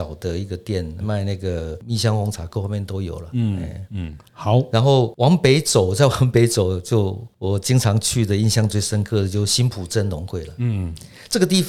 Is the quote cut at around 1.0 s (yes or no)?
yes